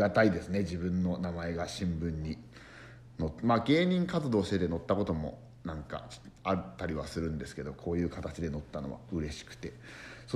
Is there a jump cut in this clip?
no; 0 cuts

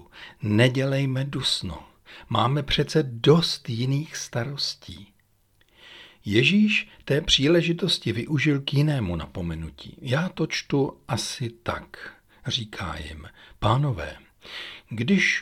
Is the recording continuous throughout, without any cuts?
yes; 0 cuts

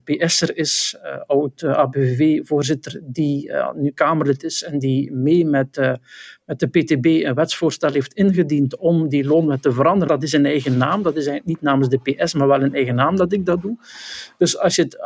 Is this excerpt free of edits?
no; 1 cut; at 10.1 s

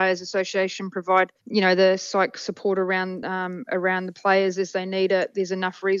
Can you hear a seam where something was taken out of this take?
no; 0 cuts

